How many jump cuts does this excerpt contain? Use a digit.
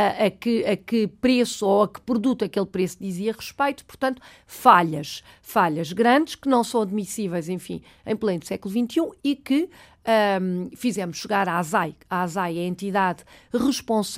0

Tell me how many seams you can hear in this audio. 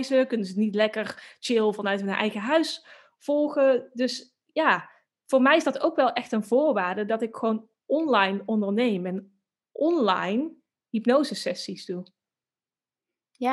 0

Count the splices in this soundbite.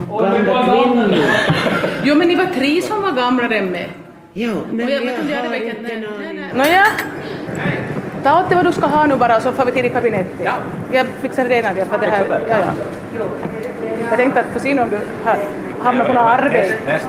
1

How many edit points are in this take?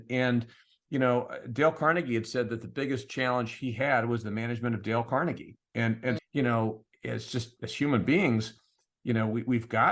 1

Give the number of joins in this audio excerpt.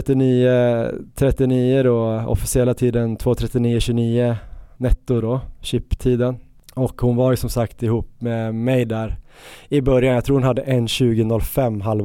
0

